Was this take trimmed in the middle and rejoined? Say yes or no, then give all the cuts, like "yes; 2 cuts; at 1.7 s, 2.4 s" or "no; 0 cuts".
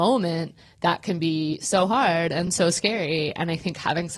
no; 0 cuts